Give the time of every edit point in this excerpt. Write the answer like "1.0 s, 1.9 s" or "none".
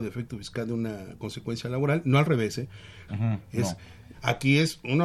3.1 s, 4.1 s